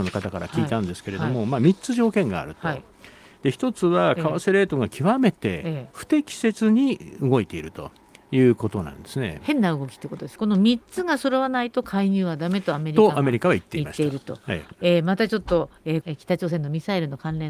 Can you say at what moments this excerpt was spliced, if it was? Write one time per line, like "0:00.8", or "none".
0:10.4
0:14.7
0:16.0